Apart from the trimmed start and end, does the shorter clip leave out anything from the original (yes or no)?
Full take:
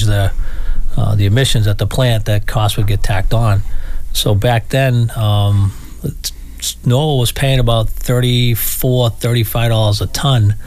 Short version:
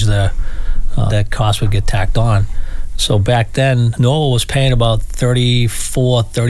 yes